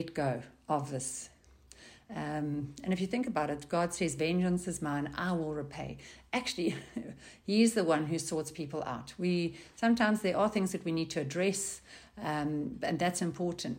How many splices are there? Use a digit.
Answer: 0